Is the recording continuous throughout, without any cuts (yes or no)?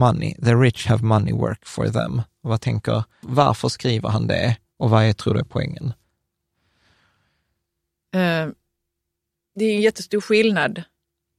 no